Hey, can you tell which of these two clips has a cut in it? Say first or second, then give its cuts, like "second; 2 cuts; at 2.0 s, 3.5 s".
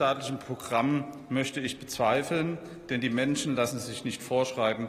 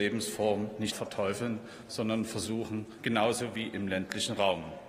second; 2 cuts; at 0.9 s, 3.0 s